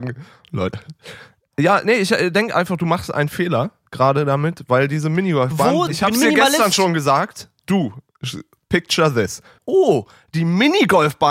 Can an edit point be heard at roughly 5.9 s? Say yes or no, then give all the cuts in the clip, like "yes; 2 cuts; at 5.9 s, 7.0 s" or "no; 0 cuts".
yes; 2 cuts; at 5.9 s, 9.6 s